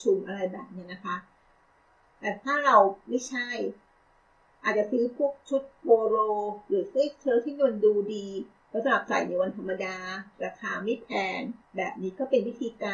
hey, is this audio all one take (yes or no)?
no